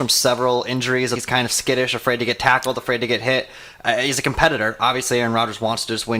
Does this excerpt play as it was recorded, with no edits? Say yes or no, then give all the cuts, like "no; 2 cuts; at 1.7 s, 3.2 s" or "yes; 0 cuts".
no; 1 cut; at 1.2 s